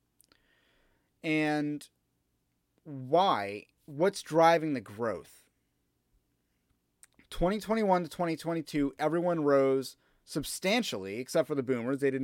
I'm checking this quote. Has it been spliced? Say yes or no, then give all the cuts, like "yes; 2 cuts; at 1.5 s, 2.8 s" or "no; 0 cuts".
no; 0 cuts